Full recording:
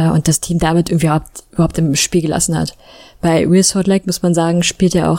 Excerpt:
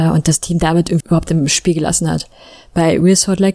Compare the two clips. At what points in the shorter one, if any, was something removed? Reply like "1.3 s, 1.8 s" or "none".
1.0 s